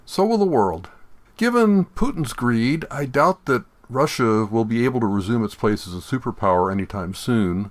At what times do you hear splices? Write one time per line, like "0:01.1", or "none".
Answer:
0:01.3